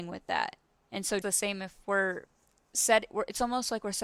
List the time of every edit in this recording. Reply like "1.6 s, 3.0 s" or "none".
1.2 s